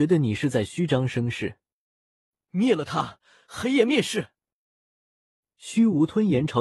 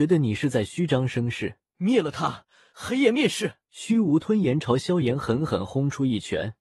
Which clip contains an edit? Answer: second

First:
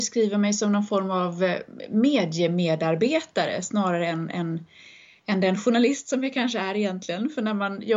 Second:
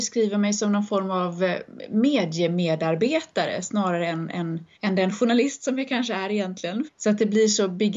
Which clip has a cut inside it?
second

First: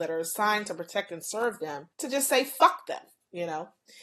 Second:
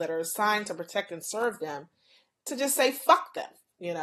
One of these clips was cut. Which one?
first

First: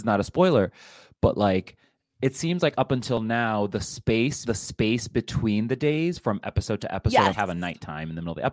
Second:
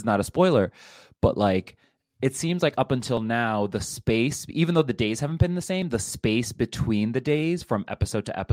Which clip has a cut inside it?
first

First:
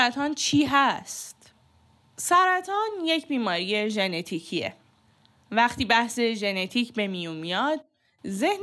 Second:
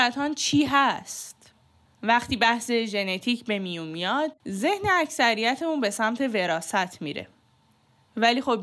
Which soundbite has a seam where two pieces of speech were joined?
second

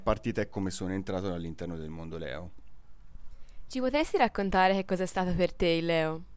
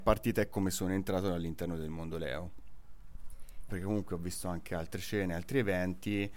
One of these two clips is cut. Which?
second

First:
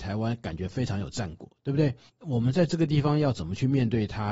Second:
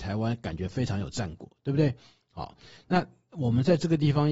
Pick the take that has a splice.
first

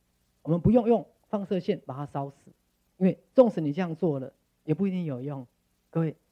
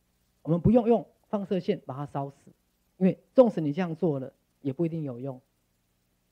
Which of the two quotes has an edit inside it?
first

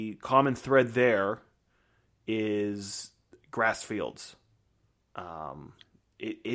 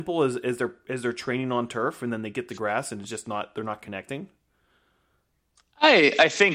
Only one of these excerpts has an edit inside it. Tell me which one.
first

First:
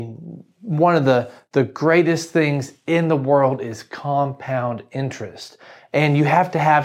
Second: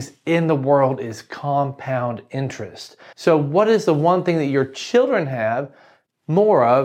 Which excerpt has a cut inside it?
second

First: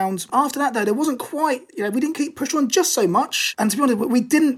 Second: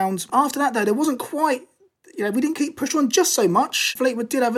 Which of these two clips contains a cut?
first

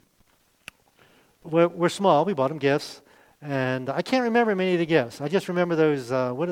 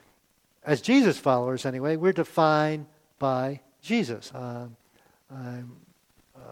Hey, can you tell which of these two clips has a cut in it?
second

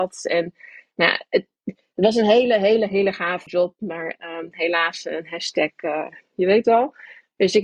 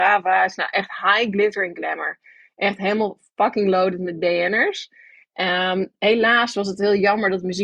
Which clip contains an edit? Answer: first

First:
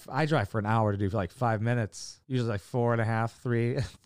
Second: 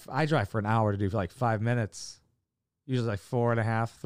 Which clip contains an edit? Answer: first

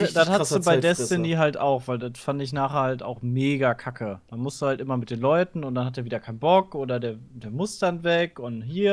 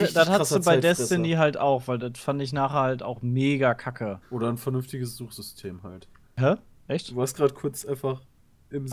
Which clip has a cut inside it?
second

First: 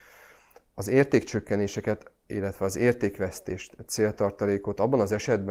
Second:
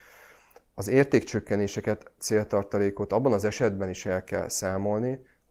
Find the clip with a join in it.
second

